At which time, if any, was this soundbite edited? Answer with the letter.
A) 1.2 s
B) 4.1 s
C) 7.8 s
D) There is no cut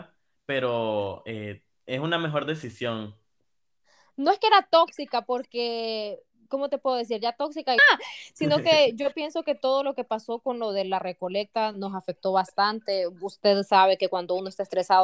C